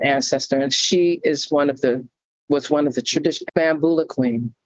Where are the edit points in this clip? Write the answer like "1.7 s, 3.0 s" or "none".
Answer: 3.5 s